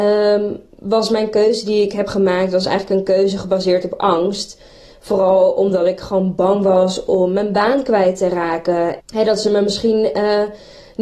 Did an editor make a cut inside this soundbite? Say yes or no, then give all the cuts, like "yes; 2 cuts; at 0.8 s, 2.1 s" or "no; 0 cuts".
yes; 1 cut; at 9.0 s